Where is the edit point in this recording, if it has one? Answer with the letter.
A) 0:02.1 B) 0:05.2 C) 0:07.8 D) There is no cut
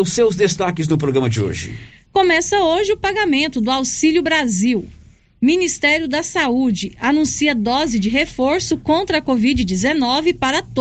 A